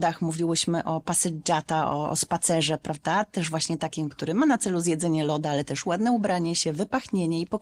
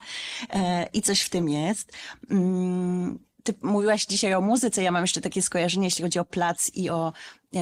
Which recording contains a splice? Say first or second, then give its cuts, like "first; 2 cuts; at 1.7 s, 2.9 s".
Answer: second; 1 cut; at 3.3 s